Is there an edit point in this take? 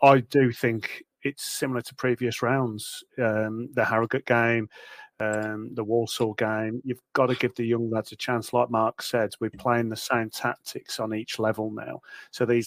no; 0 cuts

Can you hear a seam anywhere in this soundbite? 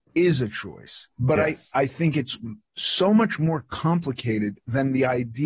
yes; 1 cut; at 1.1 s

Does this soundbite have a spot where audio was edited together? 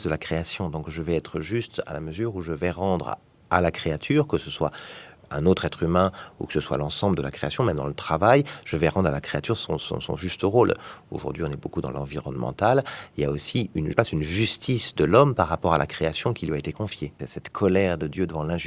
yes; 2 cuts; at 13.9 s, 17.2 s

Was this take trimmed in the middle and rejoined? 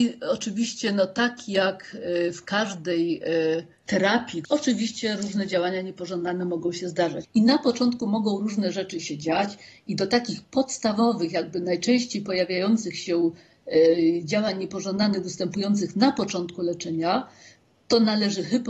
yes; 2 cuts; at 4.4 s, 7.2 s

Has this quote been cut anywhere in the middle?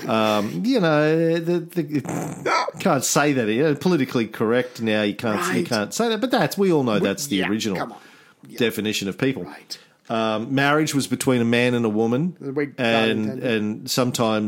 no; 0 cuts

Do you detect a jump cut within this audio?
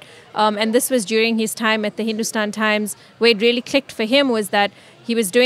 no; 0 cuts

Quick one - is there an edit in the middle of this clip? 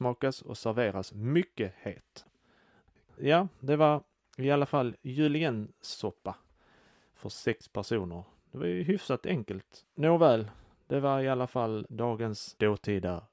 yes; 1 cut; at 9.8 s

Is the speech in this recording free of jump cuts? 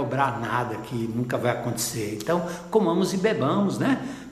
yes; 0 cuts

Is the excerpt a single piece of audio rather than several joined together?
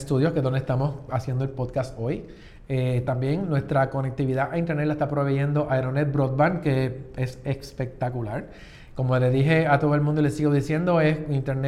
yes; 0 cuts

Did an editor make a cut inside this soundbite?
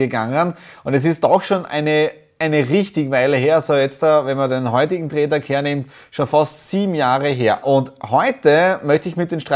yes; 1 cut; at 7.6 s

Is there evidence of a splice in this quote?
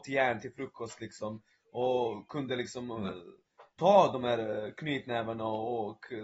no; 0 cuts

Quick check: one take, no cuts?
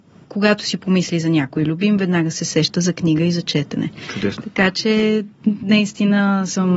yes; 0 cuts

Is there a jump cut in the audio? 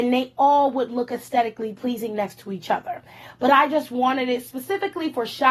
no; 0 cuts

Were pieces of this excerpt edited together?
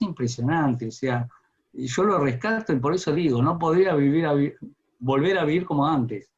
no; 0 cuts

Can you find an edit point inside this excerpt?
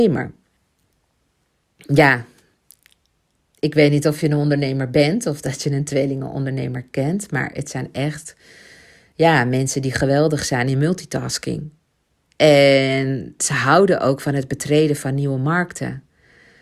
no; 0 cuts

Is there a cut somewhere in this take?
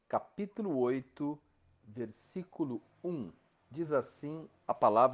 no; 0 cuts

